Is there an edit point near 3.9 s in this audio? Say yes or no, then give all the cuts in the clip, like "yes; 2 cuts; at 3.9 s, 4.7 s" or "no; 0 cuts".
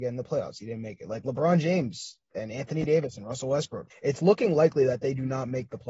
yes; 1 cut; at 3.9 s